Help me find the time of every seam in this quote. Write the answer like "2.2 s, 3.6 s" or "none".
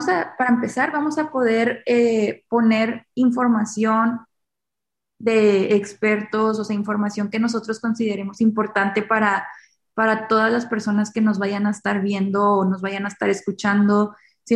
none